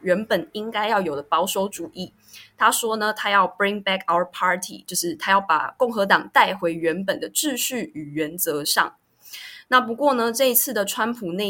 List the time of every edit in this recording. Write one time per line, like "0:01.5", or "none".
none